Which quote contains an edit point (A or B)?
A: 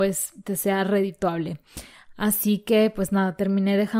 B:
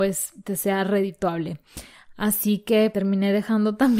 B